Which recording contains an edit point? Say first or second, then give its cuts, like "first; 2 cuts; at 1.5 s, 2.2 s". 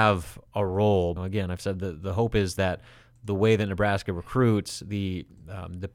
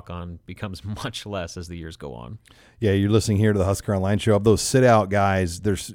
first; 1 cut; at 1.2 s